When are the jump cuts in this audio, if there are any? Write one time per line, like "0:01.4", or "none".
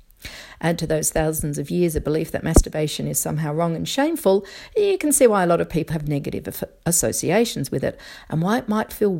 0:05.9

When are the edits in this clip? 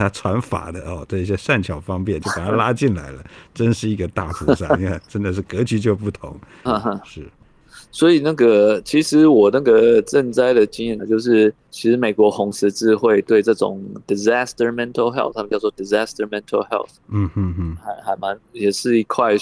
0:06.7
0:11.0

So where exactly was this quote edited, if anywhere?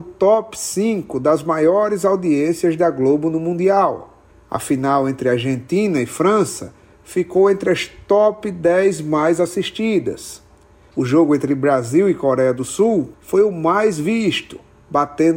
0:04.3
0:10.9
0:13.1

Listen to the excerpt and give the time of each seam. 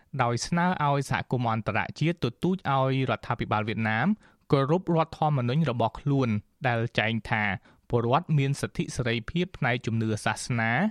none

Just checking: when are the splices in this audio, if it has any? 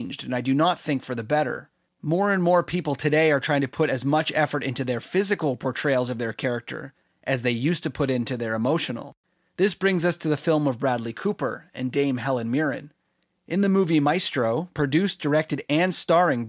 0:01.9

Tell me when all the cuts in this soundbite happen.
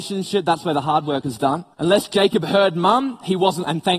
0:01.7

